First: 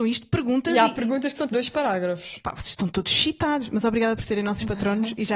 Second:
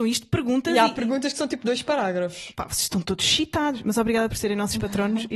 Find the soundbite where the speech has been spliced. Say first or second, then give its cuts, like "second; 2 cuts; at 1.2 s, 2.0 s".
first; 1 cut; at 1.5 s